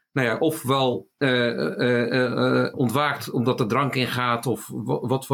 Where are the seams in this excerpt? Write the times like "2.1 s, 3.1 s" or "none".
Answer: 1.1 s, 2.7 s